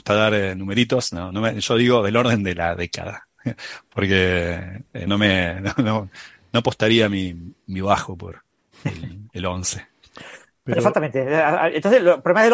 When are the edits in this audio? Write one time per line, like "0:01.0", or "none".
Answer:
0:05.1